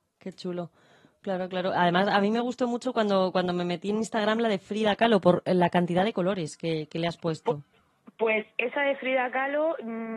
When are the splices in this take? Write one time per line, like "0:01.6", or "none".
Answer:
none